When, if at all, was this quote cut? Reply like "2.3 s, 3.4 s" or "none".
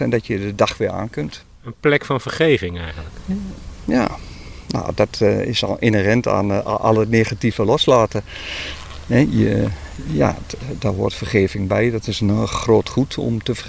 none